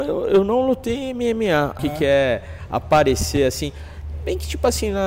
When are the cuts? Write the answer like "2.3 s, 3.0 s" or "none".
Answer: 1.8 s